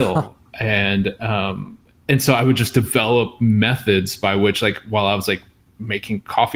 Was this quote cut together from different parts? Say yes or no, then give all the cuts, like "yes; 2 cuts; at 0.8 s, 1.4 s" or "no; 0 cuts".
no; 0 cuts